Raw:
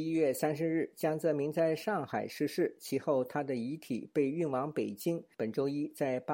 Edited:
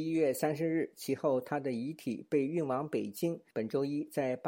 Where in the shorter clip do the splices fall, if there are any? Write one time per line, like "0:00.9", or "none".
0:00.9